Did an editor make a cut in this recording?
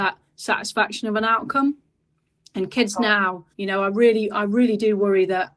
yes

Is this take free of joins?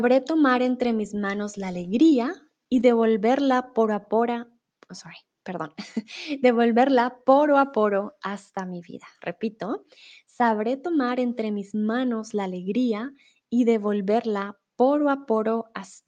yes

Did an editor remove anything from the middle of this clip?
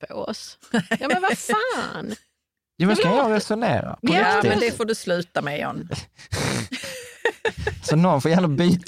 yes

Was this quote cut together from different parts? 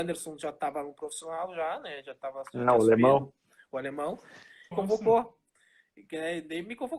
yes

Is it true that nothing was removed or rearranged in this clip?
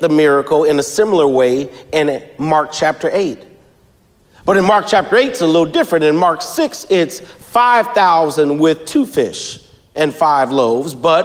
yes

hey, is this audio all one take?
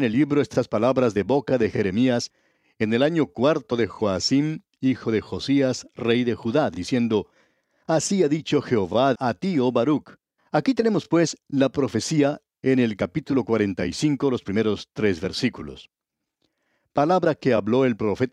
no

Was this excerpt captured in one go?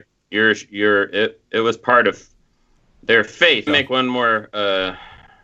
no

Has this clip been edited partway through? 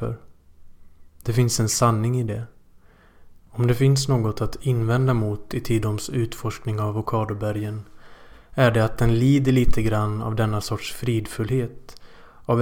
yes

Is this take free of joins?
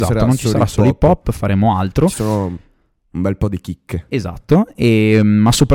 yes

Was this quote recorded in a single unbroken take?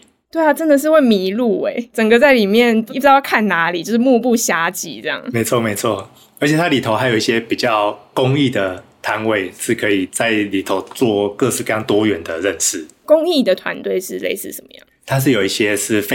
yes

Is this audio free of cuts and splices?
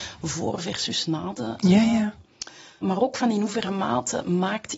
no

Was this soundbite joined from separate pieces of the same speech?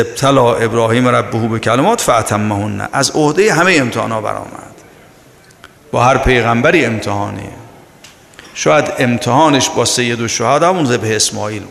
no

